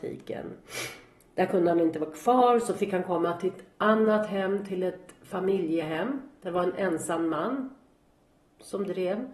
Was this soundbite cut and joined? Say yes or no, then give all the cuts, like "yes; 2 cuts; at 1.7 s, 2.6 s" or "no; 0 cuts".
no; 0 cuts